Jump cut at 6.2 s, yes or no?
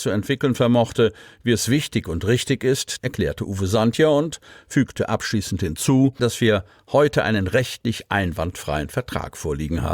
yes